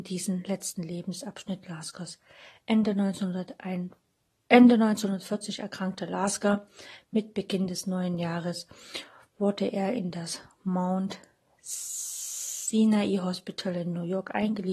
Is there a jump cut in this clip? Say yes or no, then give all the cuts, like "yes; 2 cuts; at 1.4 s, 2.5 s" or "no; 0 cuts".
no; 0 cuts